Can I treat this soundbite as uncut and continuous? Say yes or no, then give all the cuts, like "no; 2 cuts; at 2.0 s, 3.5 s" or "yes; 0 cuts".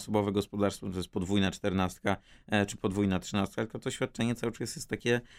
yes; 0 cuts